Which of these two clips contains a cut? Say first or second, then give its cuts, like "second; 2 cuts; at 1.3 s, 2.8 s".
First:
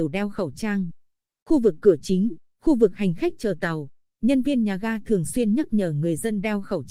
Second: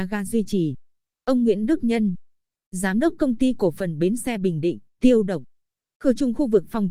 second; 1 cut; at 4.9 s